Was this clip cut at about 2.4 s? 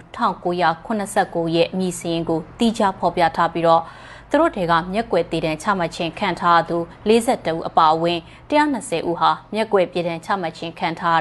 no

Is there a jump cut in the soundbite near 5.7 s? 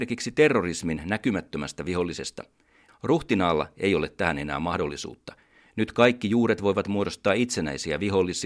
no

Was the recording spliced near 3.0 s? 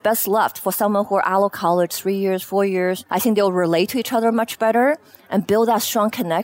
no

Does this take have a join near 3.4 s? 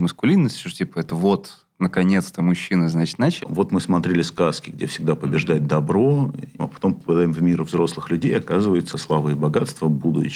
yes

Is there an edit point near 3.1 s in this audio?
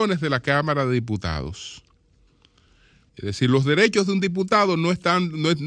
yes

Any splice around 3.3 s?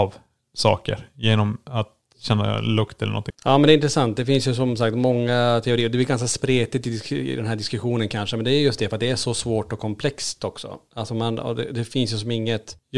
yes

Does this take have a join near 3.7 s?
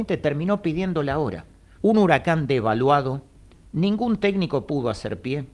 no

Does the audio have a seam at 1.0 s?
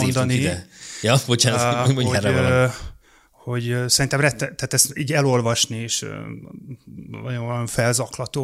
no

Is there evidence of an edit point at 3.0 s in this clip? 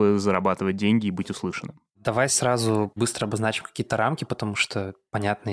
yes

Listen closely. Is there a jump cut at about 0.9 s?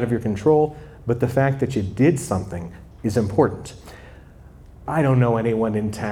no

